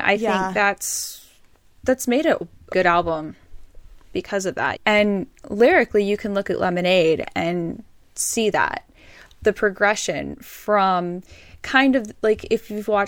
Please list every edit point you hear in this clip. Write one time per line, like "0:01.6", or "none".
0:02.7
0:04.8